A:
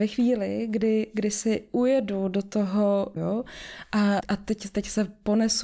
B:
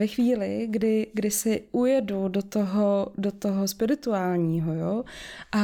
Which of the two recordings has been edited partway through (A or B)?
A